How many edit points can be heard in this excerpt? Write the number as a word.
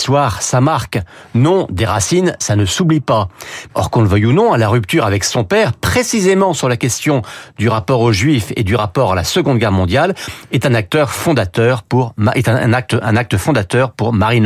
one